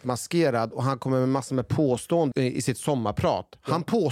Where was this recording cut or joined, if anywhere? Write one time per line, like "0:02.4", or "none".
0:02.3

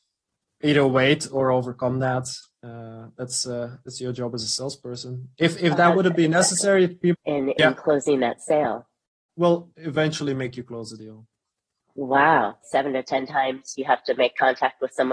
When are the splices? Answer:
0:07.1
0:09.3
0:12.6

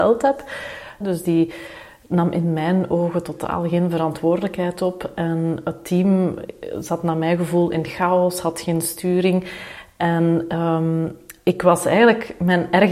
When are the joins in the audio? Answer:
0:01.0

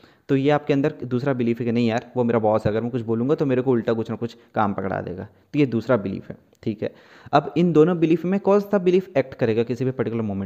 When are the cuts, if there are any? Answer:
none

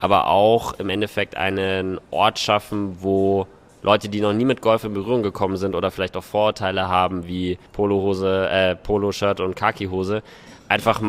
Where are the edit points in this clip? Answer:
0:07.7

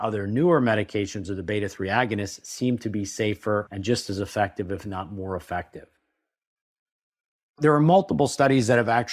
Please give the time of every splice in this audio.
none

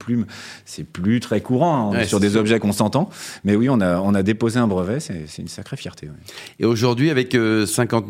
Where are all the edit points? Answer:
none

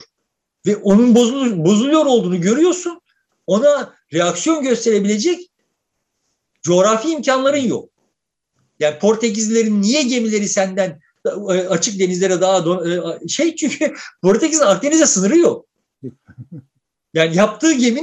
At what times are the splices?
none

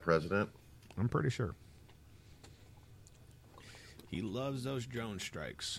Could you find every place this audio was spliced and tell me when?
none

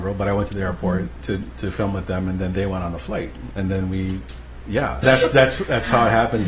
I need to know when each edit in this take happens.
0:03.5
0:05.0

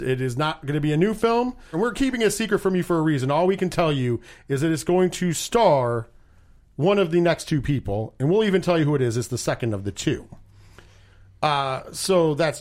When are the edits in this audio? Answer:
0:01.7

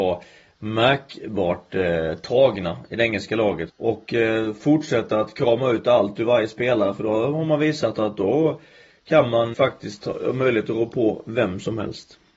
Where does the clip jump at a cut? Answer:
0:03.7
0:09.5

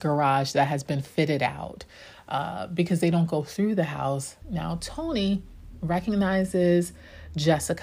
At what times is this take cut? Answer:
0:04.4

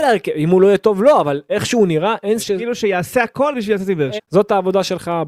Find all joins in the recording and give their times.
0:02.4
0:04.2

